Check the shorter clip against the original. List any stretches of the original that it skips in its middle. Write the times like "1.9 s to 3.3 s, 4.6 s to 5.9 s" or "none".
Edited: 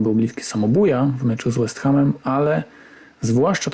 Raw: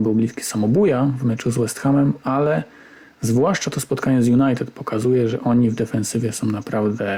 none